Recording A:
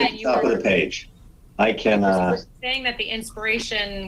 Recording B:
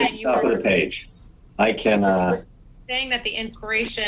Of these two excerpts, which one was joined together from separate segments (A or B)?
A